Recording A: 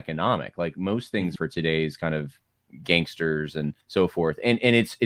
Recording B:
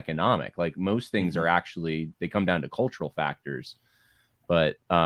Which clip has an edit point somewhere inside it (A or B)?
A